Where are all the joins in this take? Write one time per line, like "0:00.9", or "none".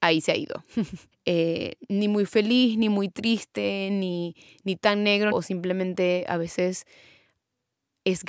0:01.1
0:05.3